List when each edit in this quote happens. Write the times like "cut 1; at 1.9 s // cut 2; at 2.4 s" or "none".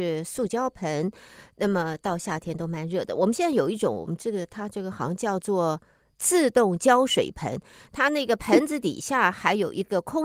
none